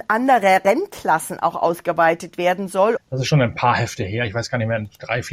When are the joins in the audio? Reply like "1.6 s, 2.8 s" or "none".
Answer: 3.0 s